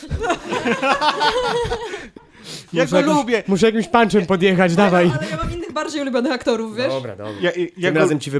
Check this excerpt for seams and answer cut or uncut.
uncut